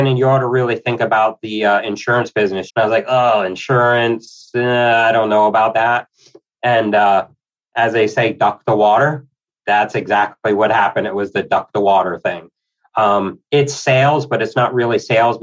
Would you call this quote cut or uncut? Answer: cut